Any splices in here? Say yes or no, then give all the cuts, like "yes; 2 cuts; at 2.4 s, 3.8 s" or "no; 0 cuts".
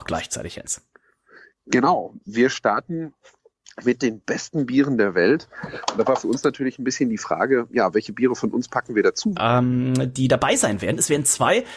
yes; 1 cut; at 9.3 s